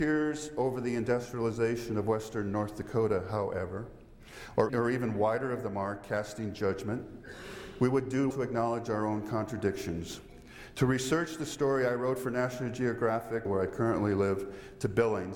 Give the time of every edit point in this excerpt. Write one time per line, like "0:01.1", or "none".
0:04.7
0:08.3
0:13.5